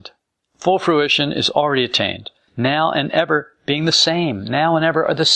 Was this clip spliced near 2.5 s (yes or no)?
yes